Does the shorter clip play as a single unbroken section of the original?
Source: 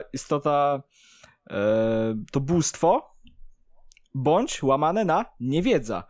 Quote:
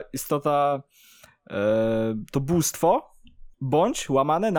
no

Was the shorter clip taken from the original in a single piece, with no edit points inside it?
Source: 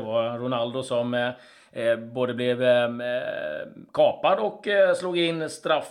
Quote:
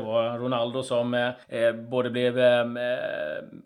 no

